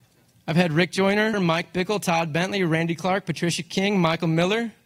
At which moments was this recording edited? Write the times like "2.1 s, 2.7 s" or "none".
1.3 s